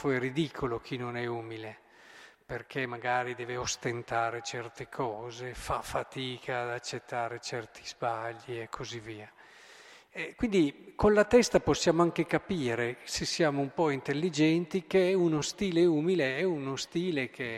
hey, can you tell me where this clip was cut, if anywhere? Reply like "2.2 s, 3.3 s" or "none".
none

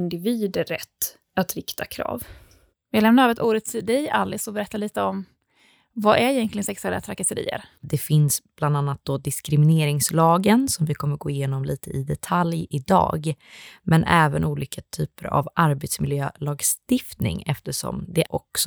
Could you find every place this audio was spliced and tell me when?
2.7 s, 7.7 s

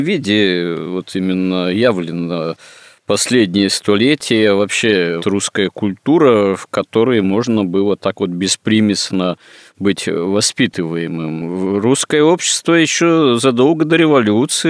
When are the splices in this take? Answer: 5.2 s

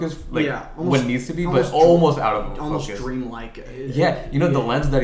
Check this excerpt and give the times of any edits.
none

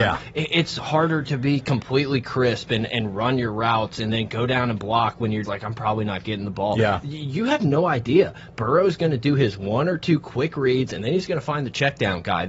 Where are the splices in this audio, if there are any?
5.4 s

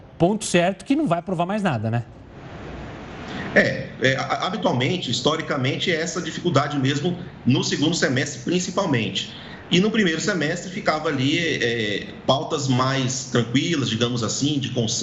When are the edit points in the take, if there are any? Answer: none

